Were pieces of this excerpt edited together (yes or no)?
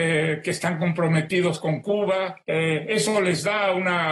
yes